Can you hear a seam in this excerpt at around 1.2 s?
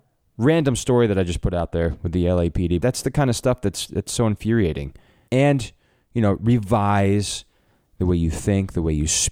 no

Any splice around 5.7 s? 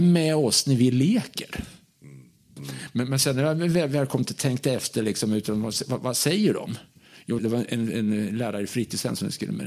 no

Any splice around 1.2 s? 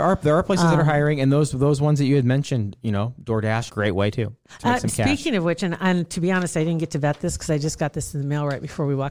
no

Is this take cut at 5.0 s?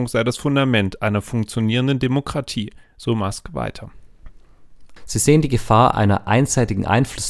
yes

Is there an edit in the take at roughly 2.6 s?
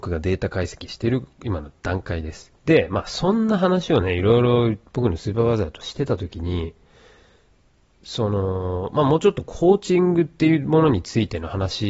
yes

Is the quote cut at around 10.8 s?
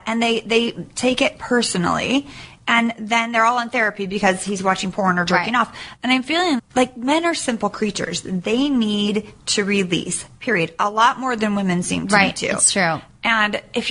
no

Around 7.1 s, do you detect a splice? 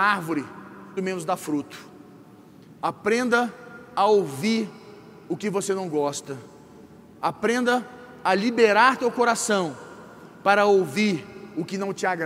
no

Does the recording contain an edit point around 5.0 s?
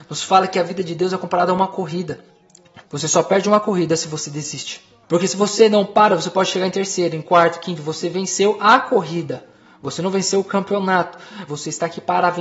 no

